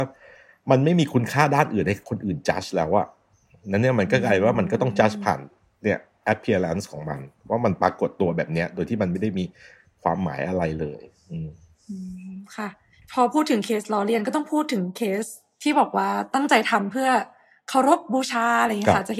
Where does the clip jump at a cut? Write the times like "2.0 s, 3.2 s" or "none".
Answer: none